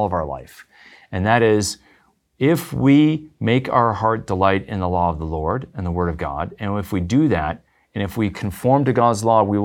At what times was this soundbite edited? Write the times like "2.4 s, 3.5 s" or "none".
none